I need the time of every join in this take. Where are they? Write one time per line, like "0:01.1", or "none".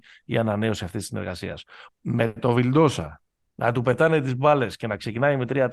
0:01.9
0:03.5